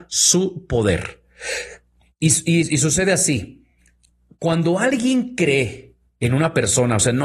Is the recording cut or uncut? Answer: uncut